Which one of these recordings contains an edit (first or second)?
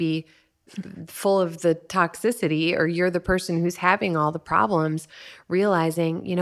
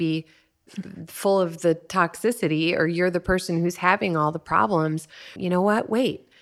second